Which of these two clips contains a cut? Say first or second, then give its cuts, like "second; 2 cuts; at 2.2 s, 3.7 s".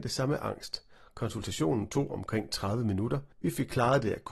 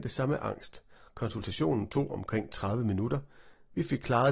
first; 1 cut; at 3.3 s